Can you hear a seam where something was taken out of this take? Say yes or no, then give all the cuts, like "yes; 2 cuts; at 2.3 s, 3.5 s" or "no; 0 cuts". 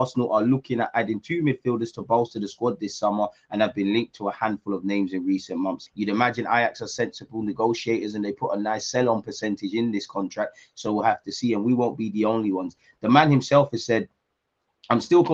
yes; 1 cut; at 5.9 s